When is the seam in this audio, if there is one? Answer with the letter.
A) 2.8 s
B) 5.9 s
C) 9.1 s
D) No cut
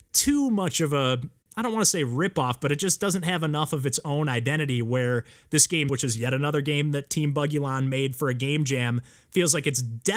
B